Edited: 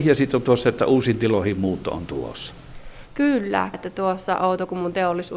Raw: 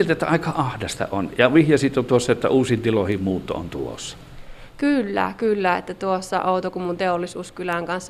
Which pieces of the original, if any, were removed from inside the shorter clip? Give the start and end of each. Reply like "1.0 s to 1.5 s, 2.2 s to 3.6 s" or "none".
5.4 s to 5.8 s